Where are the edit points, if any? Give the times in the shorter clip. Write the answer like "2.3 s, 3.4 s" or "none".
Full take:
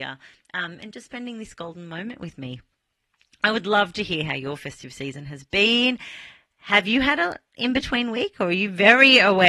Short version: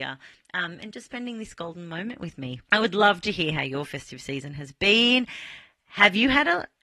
2.6 s